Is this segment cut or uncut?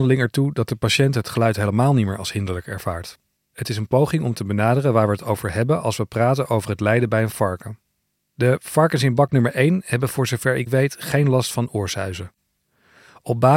cut